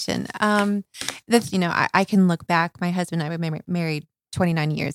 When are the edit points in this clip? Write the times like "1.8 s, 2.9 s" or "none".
1.5 s